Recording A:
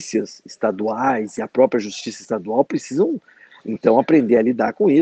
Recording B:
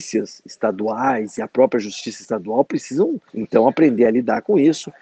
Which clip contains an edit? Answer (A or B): B